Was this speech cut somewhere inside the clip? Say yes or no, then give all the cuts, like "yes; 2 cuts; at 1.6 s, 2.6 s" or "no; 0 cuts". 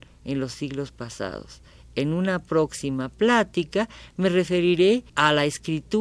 yes; 1 cut; at 5.1 s